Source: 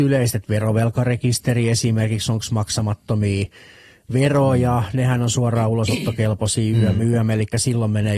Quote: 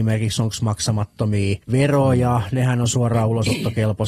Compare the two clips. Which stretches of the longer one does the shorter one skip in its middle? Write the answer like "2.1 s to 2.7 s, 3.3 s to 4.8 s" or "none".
3.5 s to 4.0 s